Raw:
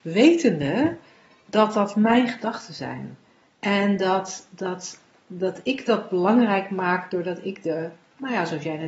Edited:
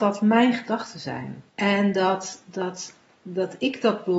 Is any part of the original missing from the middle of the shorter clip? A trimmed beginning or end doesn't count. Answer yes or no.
yes